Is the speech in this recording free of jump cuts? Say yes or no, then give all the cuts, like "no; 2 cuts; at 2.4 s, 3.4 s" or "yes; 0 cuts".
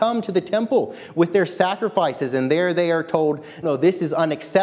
no; 1 cut; at 3.6 s